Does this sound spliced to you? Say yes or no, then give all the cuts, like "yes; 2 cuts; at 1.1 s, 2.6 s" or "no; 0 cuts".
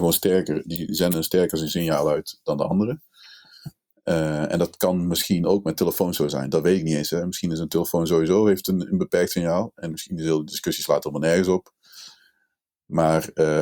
no; 0 cuts